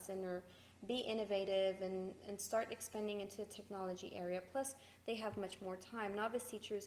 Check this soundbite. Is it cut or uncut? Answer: uncut